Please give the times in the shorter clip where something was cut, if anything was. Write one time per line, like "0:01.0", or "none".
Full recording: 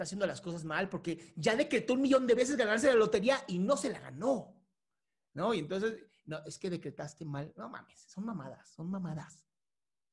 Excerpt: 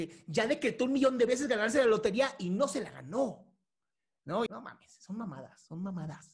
0:04.5